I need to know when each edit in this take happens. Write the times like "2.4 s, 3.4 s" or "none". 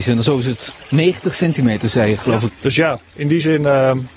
2.5 s